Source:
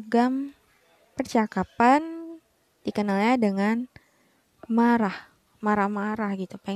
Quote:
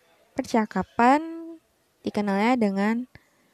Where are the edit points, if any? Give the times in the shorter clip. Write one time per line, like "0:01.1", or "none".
none